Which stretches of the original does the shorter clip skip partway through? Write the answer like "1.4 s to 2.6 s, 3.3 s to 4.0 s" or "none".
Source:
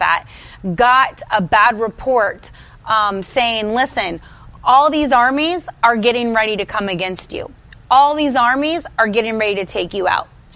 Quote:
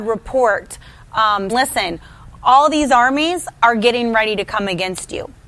3.2 s to 3.7 s